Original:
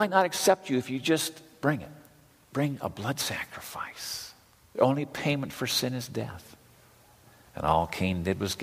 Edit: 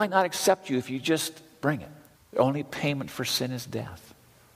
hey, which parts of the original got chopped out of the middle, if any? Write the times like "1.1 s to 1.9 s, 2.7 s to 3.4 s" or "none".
2.1 s to 4.6 s